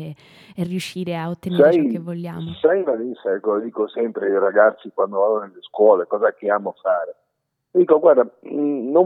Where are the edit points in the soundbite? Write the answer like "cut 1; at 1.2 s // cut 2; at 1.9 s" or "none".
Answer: cut 1; at 7.5 s